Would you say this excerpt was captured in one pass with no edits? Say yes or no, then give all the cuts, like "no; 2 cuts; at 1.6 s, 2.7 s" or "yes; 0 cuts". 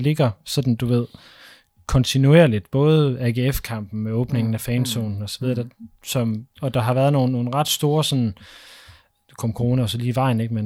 yes; 0 cuts